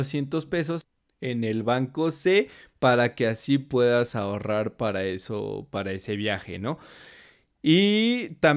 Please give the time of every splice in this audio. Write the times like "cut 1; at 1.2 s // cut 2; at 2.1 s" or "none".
none